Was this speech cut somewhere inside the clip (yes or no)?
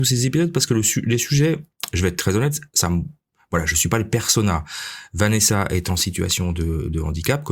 no